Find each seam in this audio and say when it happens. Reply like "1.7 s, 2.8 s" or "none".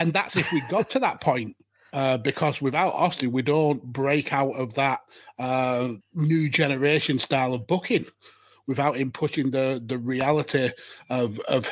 6.0 s